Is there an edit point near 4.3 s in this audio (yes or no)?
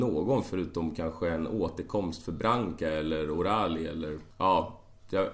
yes